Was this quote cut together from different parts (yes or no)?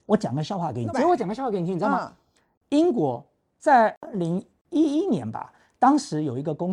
yes